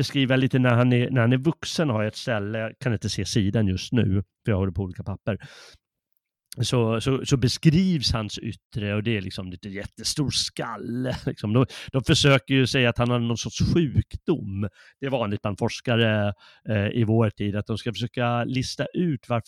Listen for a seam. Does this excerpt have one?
no; 0 cuts

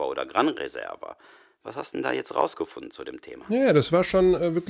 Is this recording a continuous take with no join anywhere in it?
yes; 0 cuts

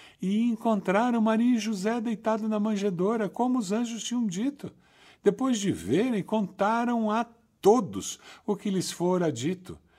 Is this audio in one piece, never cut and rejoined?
yes; 0 cuts

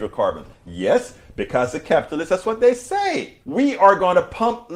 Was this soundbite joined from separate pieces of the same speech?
yes; 1 cut; at 3.4 s

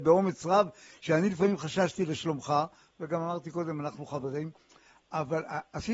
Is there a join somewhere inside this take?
no; 0 cuts

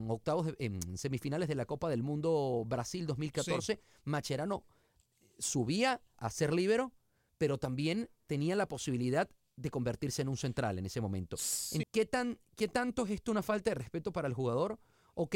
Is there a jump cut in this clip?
yes; 2 cuts; at 6.1 s, 11.8 s

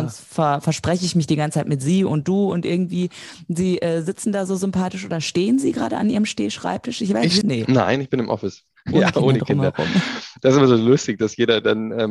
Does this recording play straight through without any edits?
no; 1 cut; at 7.4 s

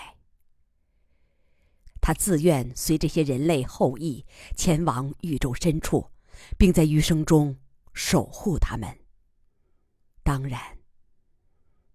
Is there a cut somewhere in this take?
yes; 1 cut; at 1.9 s

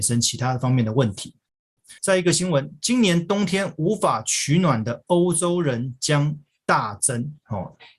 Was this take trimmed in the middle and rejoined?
yes; 1 cut; at 2.0 s

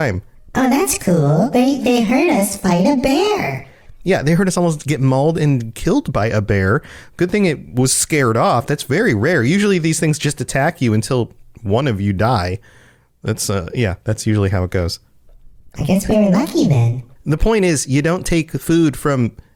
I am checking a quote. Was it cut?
yes; 1 cut; at 17.2 s

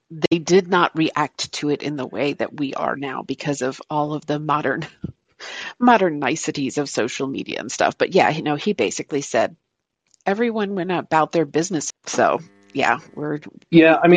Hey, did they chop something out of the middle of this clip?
yes; 1 cut; at 11.9 s

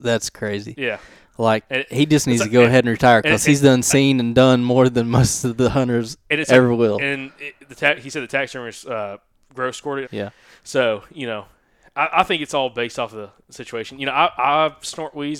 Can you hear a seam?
yes; 1 cut; at 10.0 s

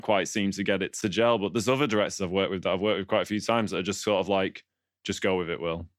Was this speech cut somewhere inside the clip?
no; 0 cuts

